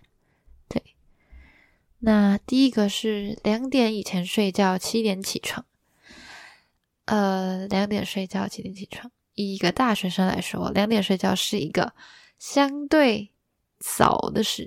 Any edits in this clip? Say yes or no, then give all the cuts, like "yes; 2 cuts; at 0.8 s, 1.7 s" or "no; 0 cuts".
no; 0 cuts